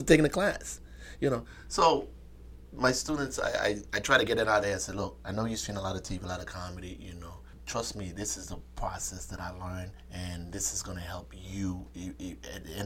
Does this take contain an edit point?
no; 0 cuts

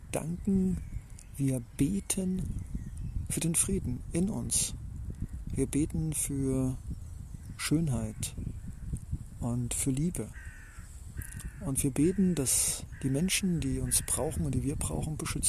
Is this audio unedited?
yes; 0 cuts

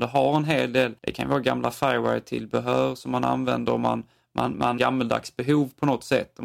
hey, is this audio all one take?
no; 2 cuts; at 1.0 s, 4.8 s

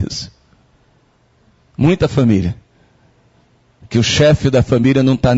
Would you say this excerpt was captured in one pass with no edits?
yes; 0 cuts

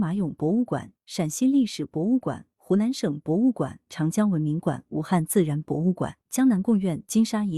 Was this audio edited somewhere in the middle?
yes; 2 cuts; at 3.9 s, 6.3 s

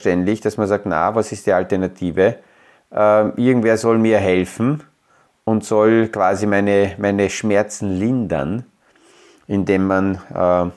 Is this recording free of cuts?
no; 1 cut; at 2.8 s

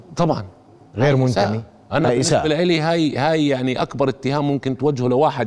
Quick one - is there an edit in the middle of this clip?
no; 0 cuts

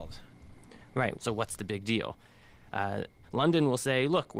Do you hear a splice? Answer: yes; 2 cuts; at 1.1 s, 3.2 s

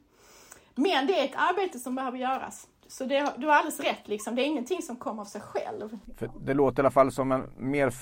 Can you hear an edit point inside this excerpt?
no; 0 cuts

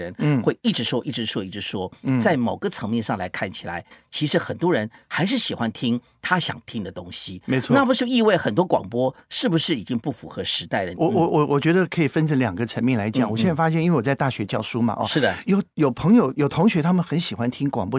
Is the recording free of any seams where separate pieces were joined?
no; 2 cuts; at 10.9 s, 15.4 s

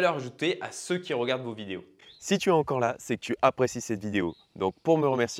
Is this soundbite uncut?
yes; 0 cuts

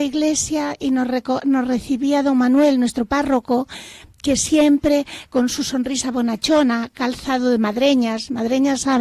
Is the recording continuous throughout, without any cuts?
yes; 0 cuts

